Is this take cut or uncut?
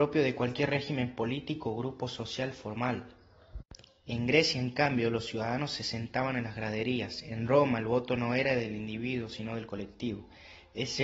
uncut